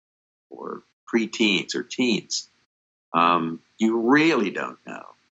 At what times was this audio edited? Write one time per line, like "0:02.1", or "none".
none